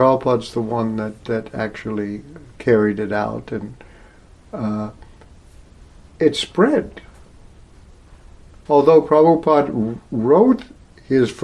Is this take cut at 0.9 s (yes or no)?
no